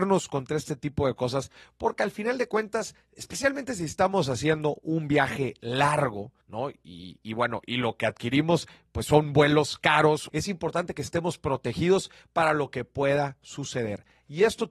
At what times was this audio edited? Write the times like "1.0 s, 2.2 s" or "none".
6.4 s, 10.3 s